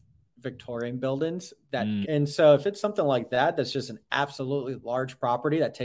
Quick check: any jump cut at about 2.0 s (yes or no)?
yes